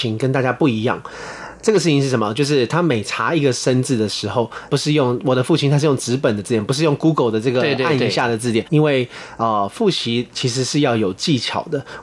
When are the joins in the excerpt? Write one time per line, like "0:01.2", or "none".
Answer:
0:04.7
0:08.6